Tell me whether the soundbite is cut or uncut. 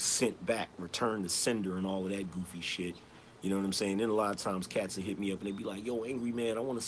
uncut